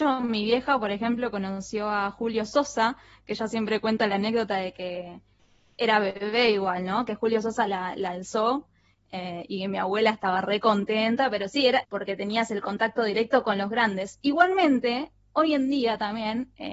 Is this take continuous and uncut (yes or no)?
no